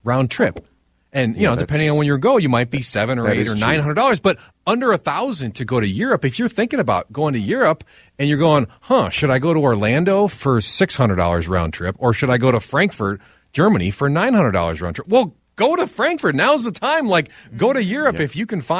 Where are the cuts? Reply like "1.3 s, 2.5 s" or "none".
none